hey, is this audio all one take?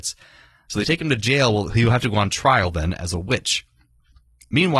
yes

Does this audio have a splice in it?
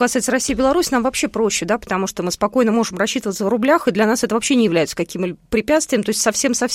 no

